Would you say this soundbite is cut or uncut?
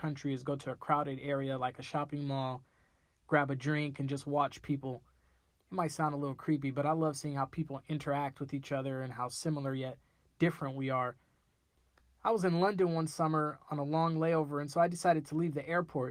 uncut